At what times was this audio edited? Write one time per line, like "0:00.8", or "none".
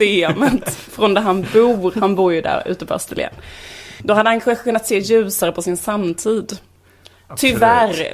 none